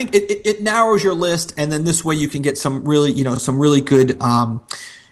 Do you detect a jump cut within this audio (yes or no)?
no